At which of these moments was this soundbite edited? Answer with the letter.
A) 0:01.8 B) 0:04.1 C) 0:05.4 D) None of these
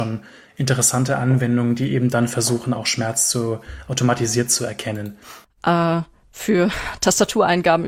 C